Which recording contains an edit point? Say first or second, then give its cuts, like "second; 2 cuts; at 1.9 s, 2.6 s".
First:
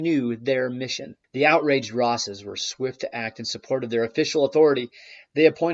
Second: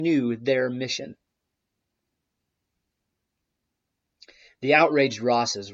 first; 1 cut; at 1.2 s